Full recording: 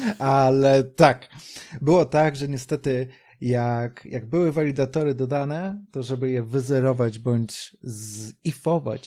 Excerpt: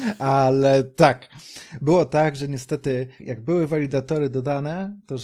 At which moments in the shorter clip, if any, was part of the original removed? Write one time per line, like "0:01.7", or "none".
0:03.2